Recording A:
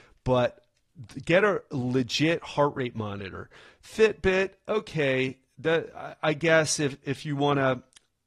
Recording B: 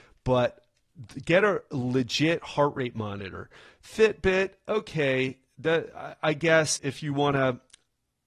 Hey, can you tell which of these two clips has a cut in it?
B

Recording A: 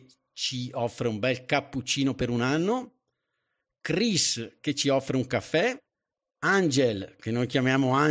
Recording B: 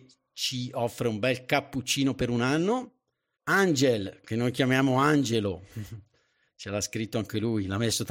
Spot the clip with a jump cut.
B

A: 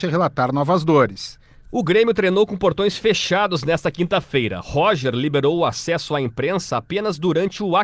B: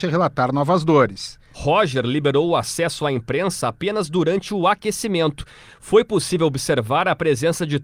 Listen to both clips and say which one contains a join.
B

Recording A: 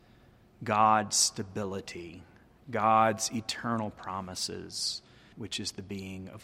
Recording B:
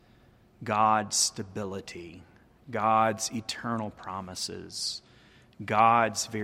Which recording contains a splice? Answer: A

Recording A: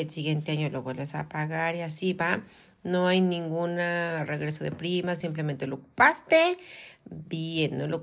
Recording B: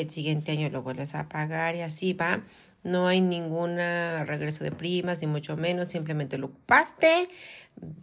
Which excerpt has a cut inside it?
A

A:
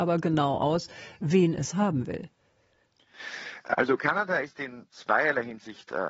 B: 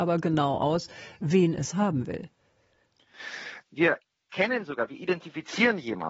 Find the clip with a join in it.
B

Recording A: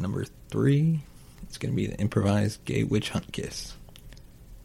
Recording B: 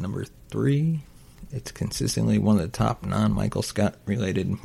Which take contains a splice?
B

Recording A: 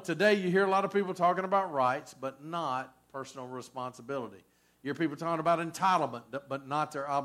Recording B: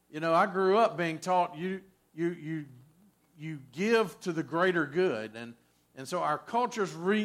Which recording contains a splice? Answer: B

